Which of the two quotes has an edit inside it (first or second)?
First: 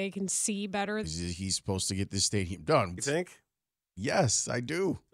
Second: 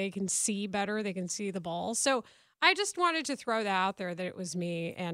first